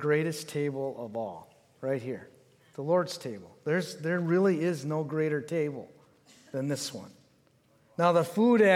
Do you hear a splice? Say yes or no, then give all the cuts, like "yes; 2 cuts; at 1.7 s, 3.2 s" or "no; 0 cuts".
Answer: no; 0 cuts